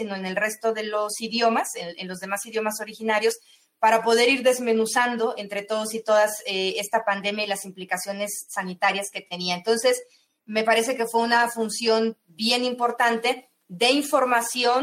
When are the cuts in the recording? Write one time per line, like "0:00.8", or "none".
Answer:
none